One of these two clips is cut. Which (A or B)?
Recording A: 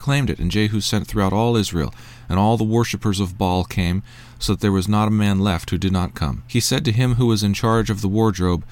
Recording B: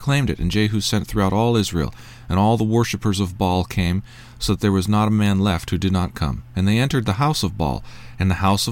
A